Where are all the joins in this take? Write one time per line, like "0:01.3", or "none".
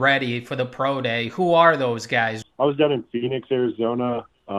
0:02.4

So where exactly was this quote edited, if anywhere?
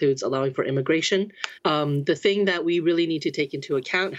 0:01.6

